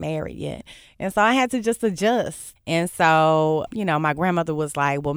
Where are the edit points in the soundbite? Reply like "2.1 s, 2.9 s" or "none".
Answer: 2.6 s, 3.7 s